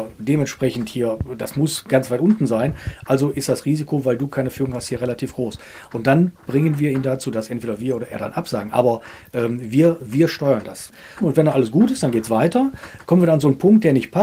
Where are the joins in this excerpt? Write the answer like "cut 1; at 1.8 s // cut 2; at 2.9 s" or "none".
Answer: cut 1; at 11.2 s